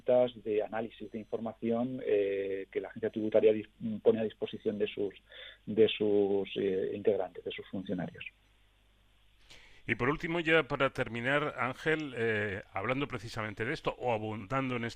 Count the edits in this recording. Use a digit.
0